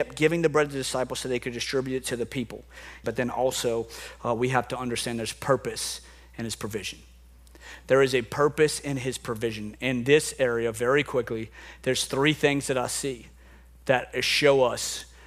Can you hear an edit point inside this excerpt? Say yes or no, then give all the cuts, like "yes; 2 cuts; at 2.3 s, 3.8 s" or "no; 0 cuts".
yes; 1 cut; at 3.0 s